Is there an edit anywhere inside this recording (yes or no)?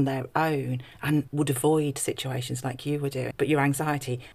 yes